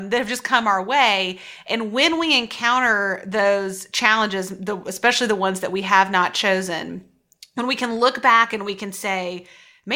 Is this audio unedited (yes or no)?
yes